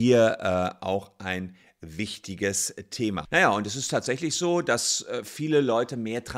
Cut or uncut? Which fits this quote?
cut